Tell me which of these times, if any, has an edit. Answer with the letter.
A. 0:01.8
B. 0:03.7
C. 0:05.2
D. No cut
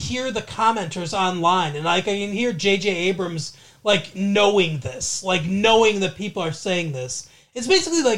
D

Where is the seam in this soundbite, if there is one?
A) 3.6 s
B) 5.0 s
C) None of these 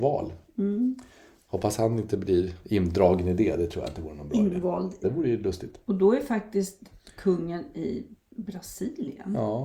B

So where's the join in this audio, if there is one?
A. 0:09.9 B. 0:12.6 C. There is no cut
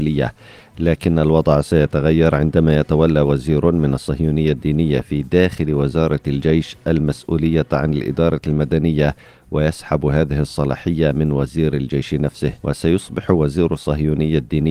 B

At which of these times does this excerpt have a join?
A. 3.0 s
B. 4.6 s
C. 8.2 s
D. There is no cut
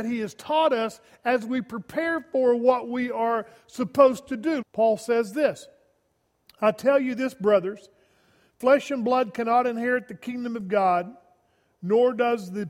B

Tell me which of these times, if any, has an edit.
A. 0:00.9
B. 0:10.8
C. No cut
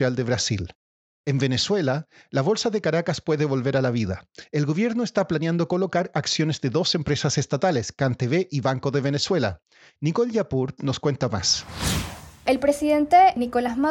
B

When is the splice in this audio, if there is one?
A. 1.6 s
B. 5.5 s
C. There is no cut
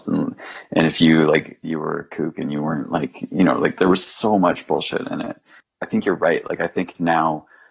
A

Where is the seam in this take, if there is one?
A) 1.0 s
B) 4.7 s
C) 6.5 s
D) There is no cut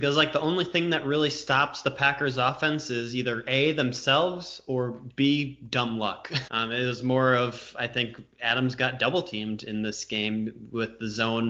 C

